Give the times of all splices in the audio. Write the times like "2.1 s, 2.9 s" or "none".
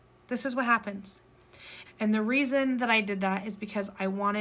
1.9 s